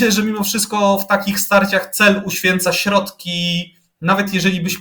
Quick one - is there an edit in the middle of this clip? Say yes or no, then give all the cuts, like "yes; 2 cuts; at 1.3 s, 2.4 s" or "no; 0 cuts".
no; 0 cuts